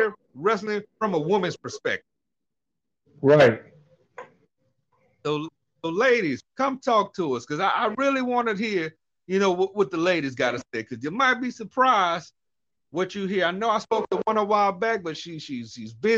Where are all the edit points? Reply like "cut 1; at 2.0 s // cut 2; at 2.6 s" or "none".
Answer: cut 1; at 6.4 s